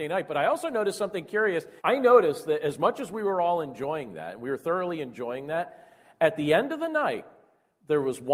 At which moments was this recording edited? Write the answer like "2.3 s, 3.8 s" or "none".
1.8 s